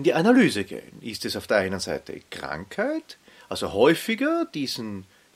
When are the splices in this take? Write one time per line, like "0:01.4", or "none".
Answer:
none